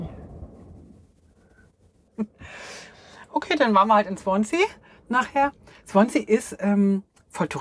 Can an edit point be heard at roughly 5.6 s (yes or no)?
no